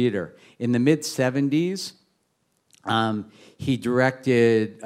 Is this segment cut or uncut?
uncut